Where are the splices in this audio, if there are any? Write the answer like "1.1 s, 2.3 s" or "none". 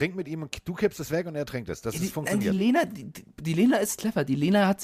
none